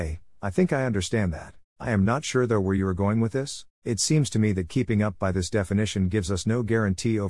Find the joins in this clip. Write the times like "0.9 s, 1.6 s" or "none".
1.7 s, 3.7 s